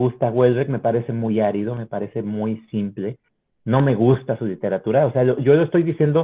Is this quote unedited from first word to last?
yes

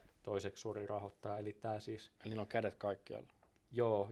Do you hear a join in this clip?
no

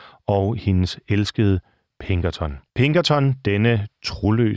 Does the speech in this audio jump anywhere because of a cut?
yes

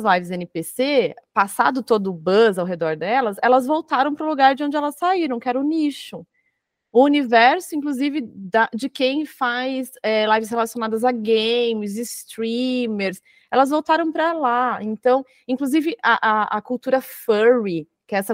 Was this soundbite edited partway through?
no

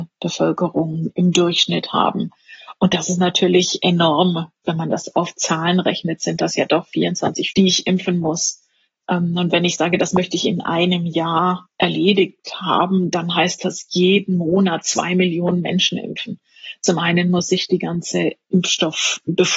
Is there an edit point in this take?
yes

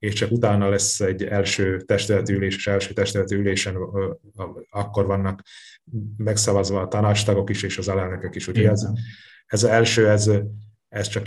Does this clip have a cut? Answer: no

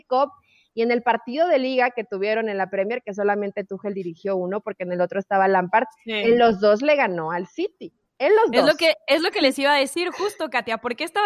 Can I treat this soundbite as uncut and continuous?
yes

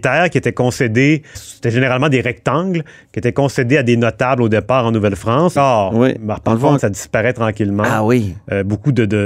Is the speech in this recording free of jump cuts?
no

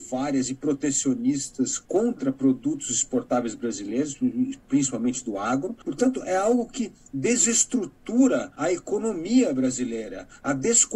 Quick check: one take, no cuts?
yes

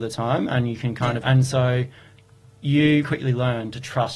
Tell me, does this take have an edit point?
yes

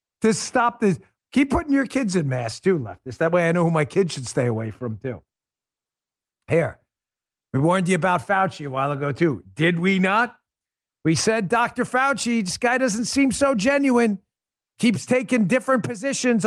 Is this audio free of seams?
no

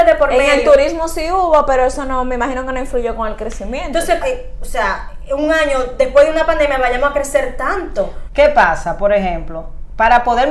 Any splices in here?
yes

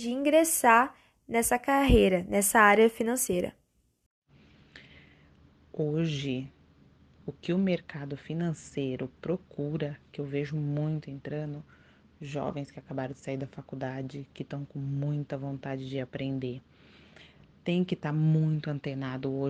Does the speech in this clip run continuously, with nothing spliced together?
yes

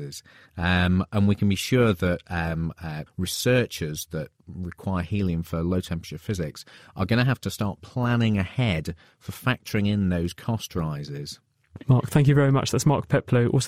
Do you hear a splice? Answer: yes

